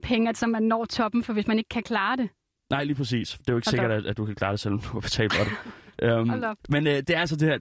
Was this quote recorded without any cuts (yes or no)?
no